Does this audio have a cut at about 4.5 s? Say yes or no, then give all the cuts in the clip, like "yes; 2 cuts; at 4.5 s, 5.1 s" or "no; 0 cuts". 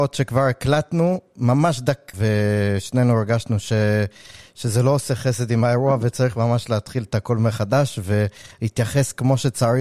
no; 1 cut; at 2.1 s